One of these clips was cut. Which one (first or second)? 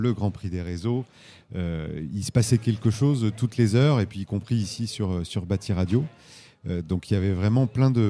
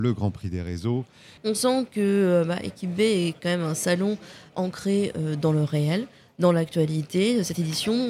second